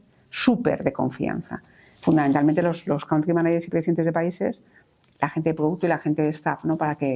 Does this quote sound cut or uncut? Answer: uncut